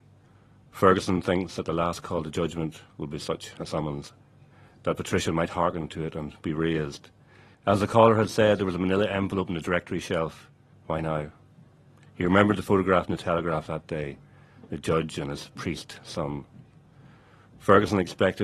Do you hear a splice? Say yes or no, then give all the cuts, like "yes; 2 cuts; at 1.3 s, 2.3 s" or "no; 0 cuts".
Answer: yes; 2 cuts; at 7.5 s, 10.7 s